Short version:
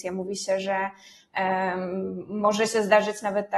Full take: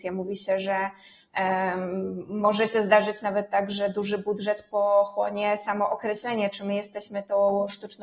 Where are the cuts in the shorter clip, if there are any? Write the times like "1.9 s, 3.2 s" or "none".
none